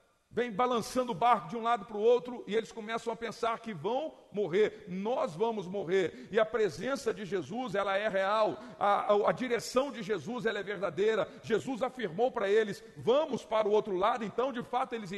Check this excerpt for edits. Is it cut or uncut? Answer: uncut